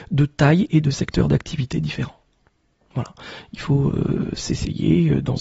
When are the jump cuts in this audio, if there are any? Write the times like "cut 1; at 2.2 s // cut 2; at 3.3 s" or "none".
none